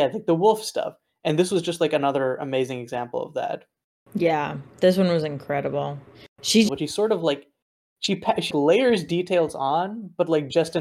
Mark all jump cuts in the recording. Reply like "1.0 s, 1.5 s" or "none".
6.7 s, 8.5 s